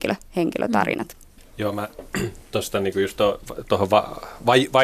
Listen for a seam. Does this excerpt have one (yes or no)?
yes